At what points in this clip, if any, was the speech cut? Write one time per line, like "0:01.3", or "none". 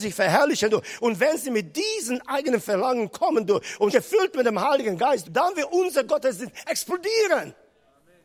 0:03.9
0:05.2